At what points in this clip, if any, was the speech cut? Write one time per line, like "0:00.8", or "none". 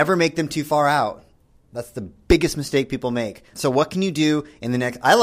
0:03.5